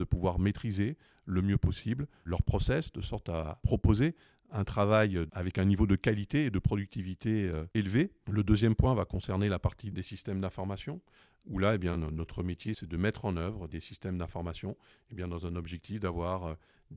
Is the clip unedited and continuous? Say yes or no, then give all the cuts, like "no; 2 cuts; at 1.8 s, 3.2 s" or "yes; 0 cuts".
yes; 0 cuts